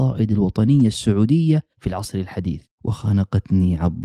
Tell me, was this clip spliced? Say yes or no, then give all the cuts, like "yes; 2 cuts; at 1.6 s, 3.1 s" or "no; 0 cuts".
yes; 1 cut; at 2.7 s